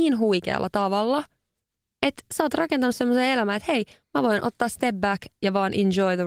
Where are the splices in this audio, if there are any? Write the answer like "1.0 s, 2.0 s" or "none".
none